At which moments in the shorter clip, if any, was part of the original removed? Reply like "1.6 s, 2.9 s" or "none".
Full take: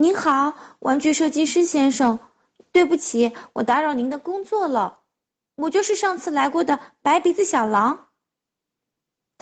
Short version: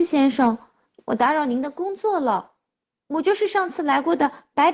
1.0 s

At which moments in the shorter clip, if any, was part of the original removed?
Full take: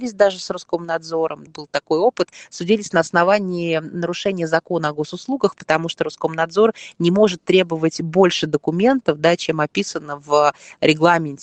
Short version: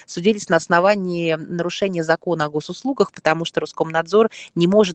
none

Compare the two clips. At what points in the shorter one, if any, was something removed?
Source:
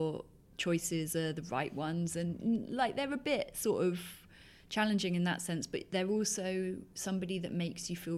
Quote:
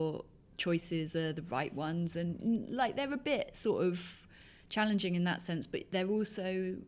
none

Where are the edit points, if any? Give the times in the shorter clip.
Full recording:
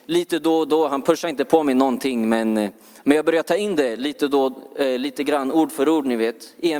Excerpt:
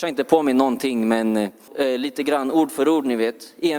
1.7 s

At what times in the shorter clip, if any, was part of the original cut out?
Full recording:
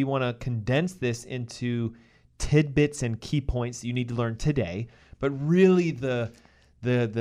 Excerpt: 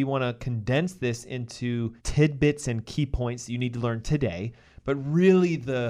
2.0 s

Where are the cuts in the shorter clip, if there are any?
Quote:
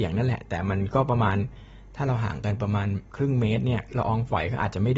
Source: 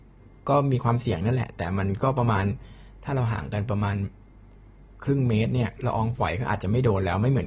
3.1 s

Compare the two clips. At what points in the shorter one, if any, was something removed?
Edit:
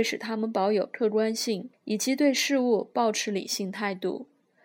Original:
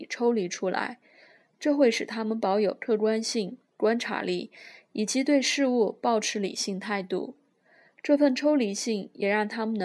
1.7 s

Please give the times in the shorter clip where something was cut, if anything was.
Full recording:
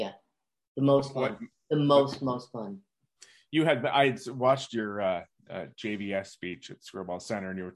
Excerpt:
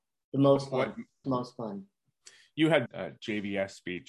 1.2 s, 2.9 s

